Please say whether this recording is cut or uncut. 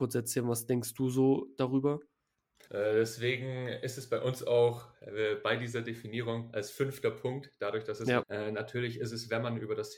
cut